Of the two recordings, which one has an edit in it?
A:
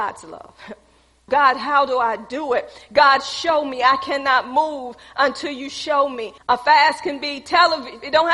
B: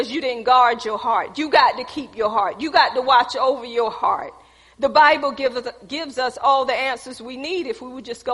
A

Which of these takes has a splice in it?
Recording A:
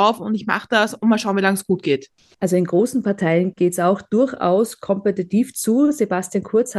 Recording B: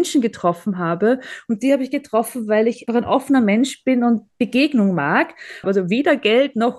B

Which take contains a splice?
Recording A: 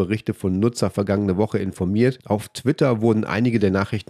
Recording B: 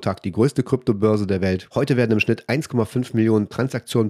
B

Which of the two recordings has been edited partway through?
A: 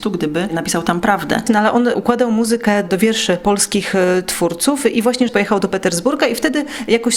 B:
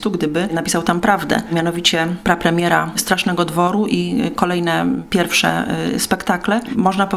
A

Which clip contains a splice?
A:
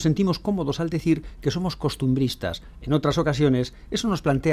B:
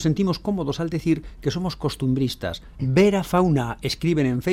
B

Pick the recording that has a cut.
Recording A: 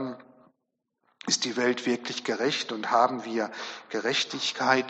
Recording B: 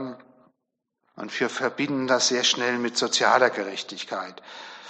B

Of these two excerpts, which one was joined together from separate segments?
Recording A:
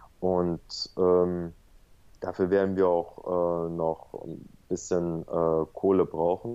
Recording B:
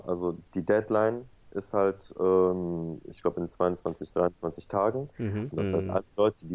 B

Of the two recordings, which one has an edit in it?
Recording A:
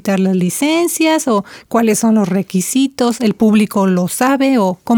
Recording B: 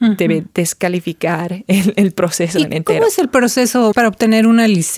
B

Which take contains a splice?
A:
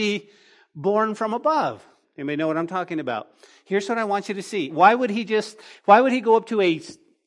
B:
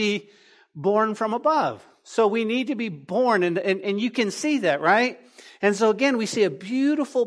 A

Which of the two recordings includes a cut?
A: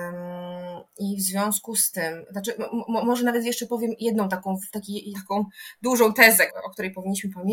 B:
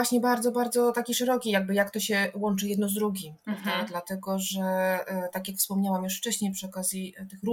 A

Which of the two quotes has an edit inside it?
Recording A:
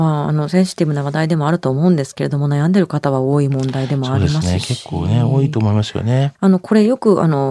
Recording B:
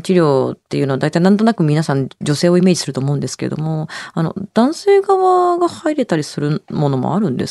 A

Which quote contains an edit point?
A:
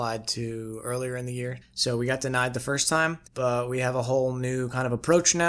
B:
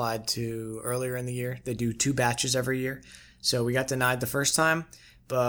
A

